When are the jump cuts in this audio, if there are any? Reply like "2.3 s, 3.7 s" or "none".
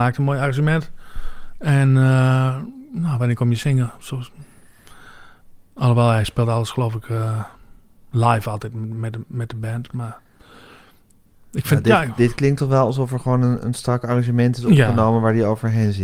none